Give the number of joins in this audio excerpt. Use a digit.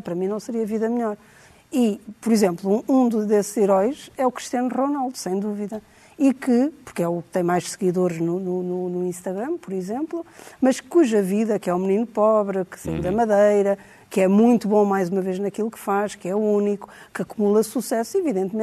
0